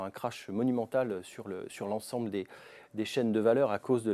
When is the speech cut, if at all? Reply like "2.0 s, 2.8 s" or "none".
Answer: none